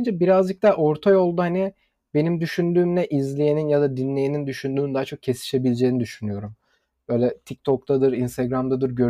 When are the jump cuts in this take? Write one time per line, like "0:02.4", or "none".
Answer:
none

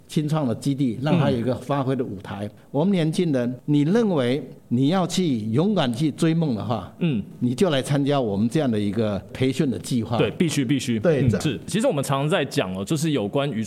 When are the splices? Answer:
0:11.4

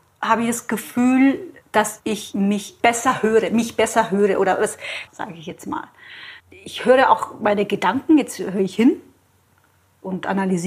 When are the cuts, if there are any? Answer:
0:05.1
0:06.4

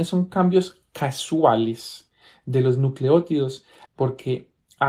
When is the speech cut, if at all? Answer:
0:03.9

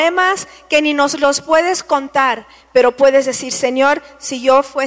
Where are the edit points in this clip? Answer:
none

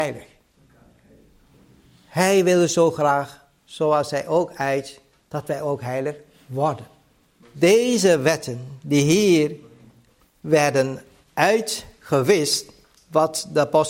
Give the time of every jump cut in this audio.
0:07.4

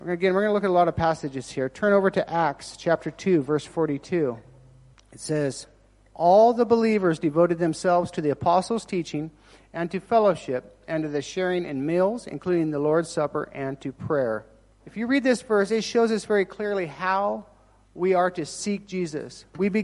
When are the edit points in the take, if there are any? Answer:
none

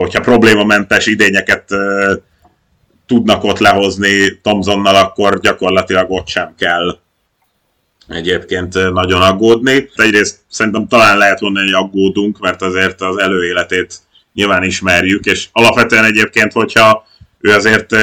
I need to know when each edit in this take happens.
0:10.0

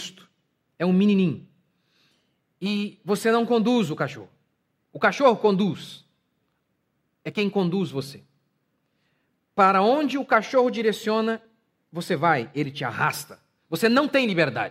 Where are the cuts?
none

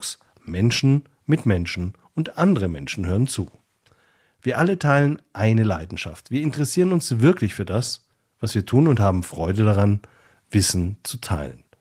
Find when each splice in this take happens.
none

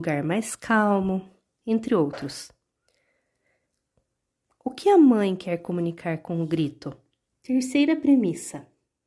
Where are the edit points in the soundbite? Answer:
0:07.3

